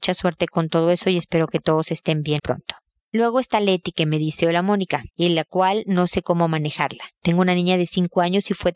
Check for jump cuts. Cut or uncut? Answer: cut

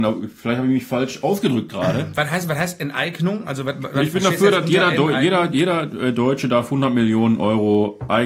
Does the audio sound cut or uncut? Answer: uncut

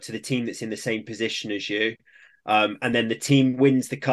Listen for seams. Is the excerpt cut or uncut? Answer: uncut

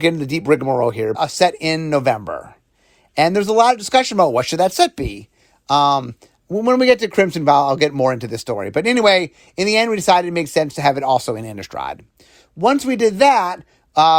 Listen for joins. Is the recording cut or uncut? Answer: cut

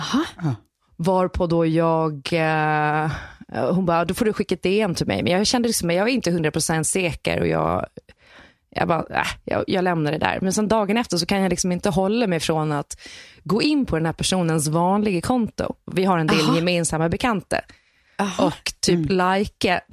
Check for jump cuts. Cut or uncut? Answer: uncut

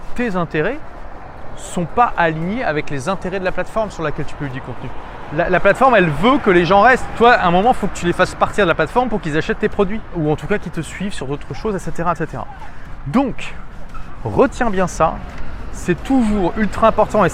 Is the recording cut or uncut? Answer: uncut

